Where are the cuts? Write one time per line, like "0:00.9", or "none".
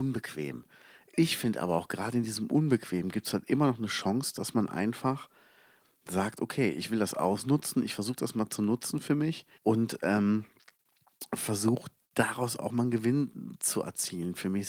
0:09.5